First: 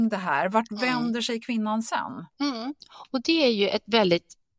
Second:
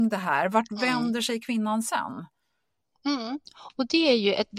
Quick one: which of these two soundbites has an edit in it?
first; 1 cut; at 2.3 s

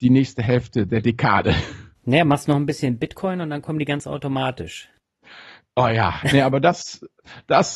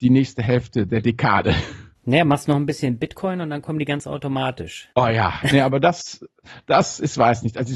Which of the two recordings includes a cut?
second; 1 cut; at 4.9 s

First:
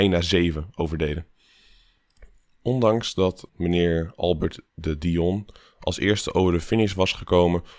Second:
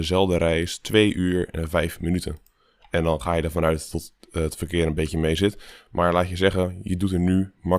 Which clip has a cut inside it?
first; 1 cut; at 3.5 s

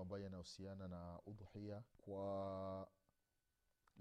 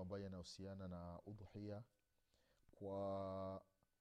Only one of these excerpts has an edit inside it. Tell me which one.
first; 1 cut; at 1.9 s

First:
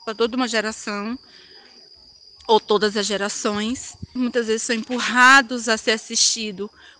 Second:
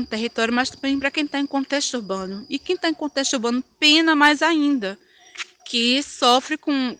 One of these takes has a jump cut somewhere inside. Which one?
first; 1 cut; at 4.2 s

